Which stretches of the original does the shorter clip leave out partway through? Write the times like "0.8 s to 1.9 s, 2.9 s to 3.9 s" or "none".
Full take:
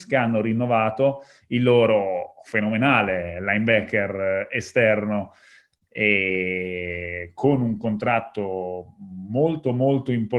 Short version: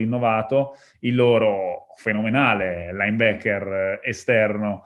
none